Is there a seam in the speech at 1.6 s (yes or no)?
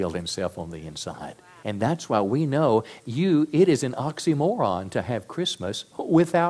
yes